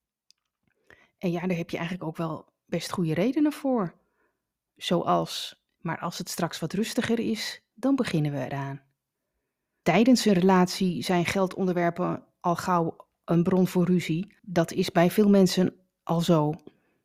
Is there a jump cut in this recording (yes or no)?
yes